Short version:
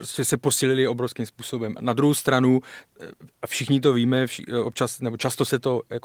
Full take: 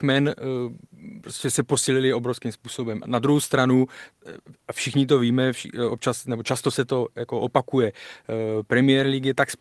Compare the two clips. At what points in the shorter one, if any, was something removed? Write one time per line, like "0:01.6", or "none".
none